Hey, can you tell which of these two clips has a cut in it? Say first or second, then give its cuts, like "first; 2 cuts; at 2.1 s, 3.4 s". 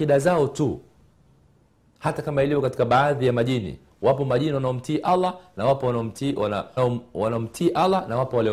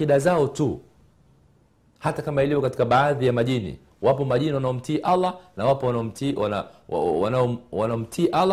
first; 1 cut; at 6.8 s